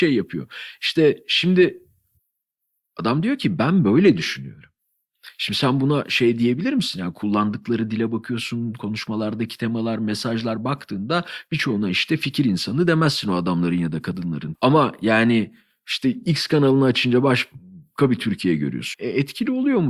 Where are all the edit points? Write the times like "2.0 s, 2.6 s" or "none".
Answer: 14.5 s, 18.9 s